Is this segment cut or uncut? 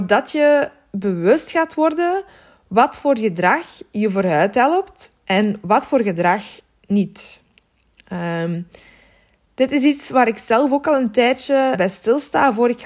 cut